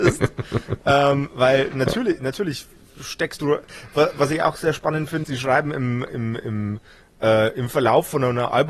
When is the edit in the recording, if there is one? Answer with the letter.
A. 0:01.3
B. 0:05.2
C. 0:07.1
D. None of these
B